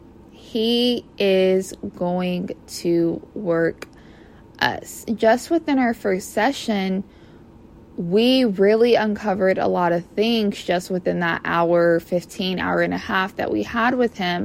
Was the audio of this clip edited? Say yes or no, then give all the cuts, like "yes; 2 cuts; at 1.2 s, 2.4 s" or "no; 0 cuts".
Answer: no; 0 cuts